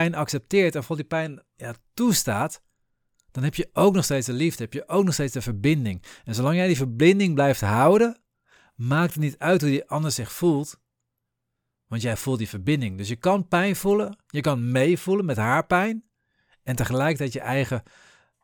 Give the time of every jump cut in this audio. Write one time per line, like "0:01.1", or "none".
none